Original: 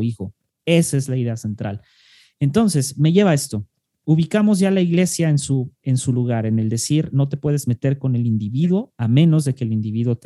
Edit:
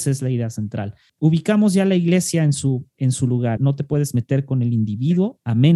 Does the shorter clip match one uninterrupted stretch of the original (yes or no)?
no